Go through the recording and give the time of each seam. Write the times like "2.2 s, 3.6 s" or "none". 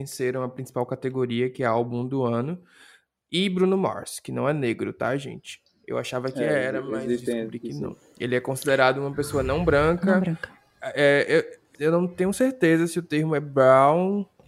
11.7 s